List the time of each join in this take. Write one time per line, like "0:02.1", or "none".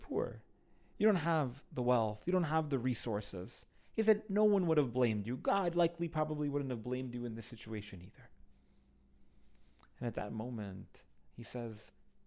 0:11.3

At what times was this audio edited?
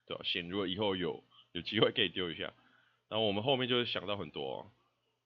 none

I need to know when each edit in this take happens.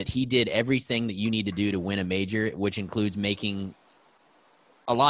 none

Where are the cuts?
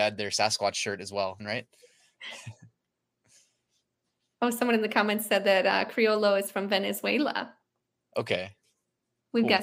0:01.4

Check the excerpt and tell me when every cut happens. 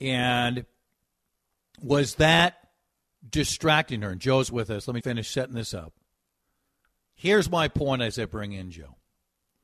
0:05.0

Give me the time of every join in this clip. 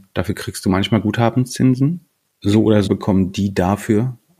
0:02.8

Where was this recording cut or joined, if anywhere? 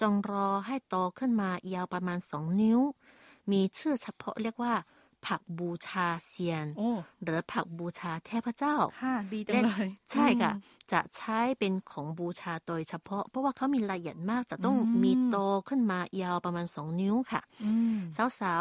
none

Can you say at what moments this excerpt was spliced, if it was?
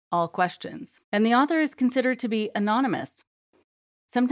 0:01.0

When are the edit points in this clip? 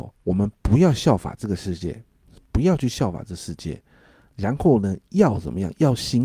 none

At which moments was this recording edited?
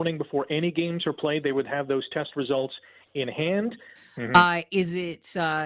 0:04.0

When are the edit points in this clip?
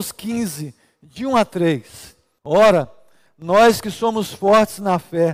0:02.4

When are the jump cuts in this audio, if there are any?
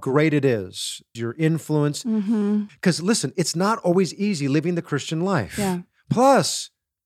0:01.2
0:02.7

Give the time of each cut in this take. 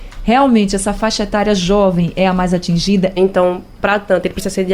0:03.2

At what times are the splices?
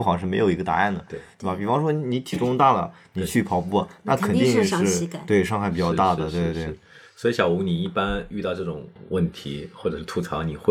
none

